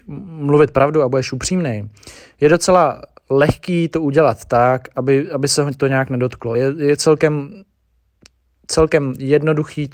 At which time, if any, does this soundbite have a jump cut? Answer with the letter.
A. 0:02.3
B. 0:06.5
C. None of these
C